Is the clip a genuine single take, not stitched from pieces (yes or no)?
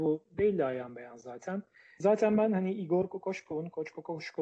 yes